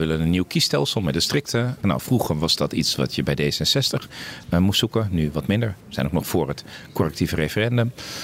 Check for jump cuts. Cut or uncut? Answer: cut